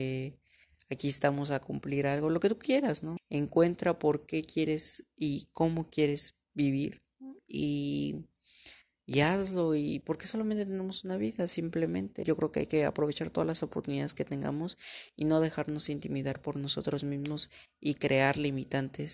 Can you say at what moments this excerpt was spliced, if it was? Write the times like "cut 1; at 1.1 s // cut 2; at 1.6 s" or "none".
cut 1; at 3.2 s // cut 2; at 12.2 s

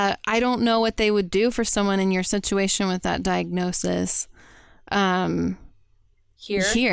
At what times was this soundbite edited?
none

